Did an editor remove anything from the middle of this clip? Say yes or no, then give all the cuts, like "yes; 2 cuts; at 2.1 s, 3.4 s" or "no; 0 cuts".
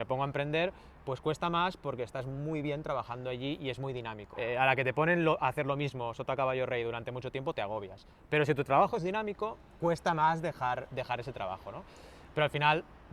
yes; 1 cut; at 4.3 s